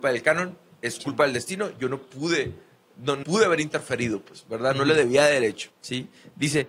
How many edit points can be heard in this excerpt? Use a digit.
2